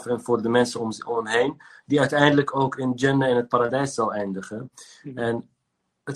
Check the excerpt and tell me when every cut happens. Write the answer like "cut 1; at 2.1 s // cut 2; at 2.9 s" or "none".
none